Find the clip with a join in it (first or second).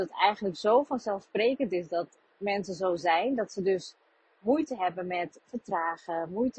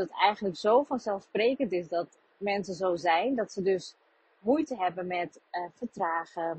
first